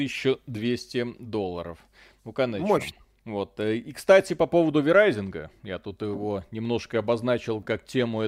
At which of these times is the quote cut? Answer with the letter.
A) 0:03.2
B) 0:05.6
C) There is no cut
A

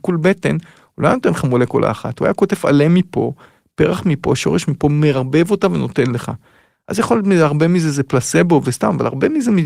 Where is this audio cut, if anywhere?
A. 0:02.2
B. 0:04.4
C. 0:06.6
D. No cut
D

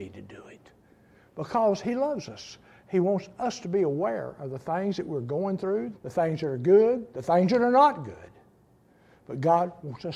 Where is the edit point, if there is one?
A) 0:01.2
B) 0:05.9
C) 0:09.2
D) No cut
B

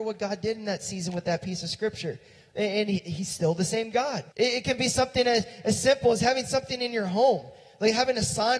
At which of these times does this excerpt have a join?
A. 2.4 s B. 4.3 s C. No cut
B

